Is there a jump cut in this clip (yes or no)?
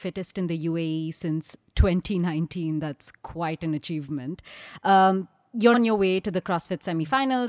yes